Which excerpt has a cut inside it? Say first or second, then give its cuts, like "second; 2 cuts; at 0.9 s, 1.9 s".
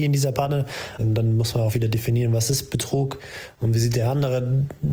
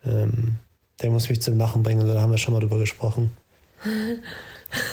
first; 1 cut; at 1.0 s